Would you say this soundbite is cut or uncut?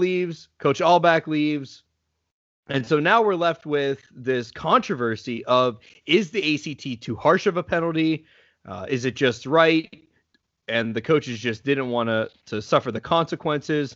uncut